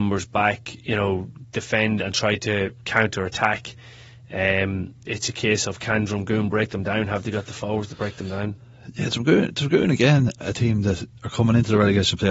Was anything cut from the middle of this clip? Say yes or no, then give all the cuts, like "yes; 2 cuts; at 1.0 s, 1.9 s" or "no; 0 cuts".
yes; 1 cut; at 5.1 s